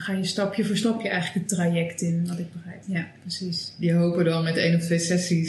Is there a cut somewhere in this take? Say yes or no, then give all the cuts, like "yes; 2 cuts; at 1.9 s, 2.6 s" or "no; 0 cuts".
yes; 1 cut; at 2.8 s